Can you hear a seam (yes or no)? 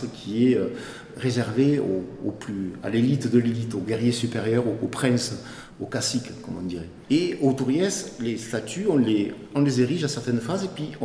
no